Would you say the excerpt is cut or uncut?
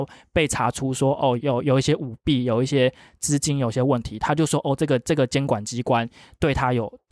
cut